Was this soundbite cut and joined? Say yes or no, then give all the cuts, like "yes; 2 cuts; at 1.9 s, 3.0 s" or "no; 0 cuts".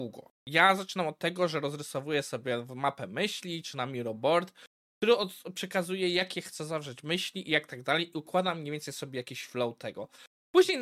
no; 0 cuts